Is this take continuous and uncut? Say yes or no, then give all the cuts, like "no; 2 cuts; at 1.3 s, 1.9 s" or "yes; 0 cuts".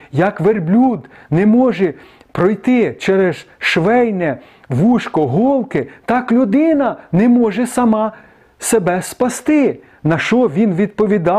yes; 0 cuts